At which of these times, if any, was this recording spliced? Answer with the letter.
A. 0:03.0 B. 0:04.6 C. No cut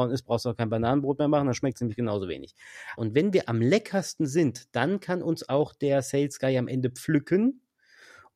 A